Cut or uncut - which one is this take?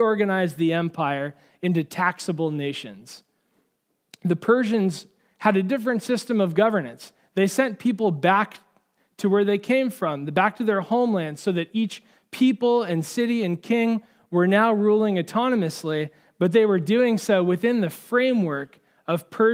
uncut